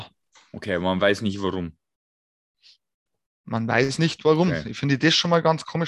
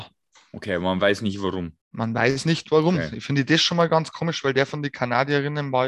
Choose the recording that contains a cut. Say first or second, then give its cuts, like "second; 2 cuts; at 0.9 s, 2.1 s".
second; 1 cut; at 1.8 s